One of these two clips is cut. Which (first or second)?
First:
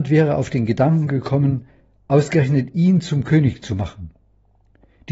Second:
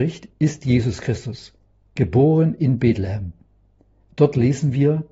second